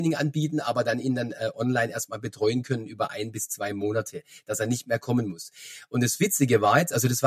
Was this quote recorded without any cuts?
yes; 0 cuts

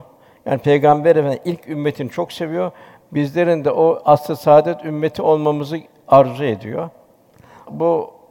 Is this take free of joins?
yes; 0 cuts

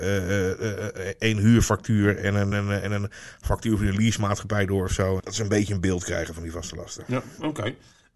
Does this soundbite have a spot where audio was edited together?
yes; 2 cuts; at 2.5 s, 5.2 s

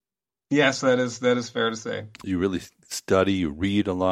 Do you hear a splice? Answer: yes; 1 cut; at 2.2 s

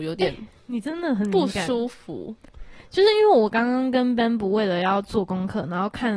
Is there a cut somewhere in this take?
no; 0 cuts

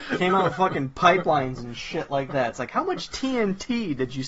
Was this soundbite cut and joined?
no; 0 cuts

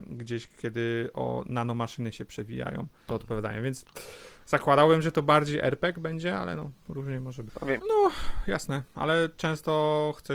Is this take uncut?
no; 3 cuts; at 3.1 s, 7.8 s, 8.9 s

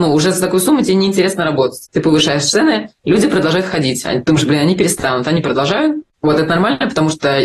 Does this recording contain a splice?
no; 0 cuts

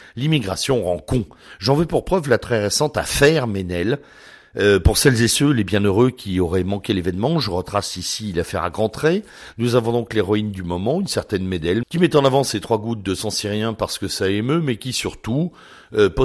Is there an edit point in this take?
yes; 1 cut; at 11.8 s

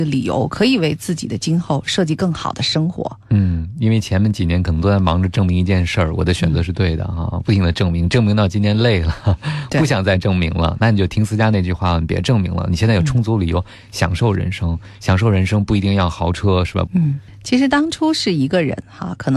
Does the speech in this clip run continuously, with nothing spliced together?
no; 1 cut; at 16.9 s

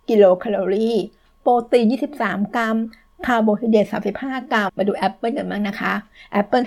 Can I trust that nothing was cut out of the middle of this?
no; 1 cut; at 4.7 s

